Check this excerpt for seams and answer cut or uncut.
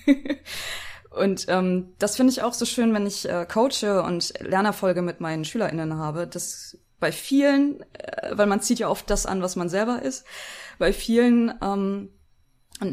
uncut